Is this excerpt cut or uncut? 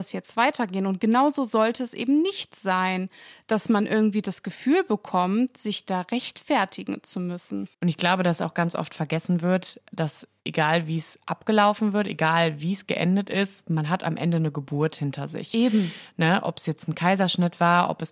cut